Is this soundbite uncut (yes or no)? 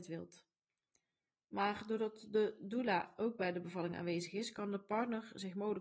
no